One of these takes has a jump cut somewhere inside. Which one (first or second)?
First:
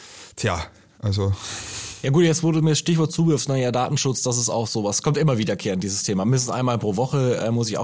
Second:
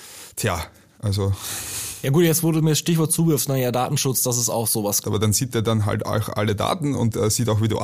second